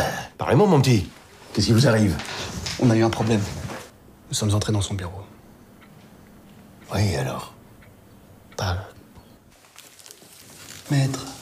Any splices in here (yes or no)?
no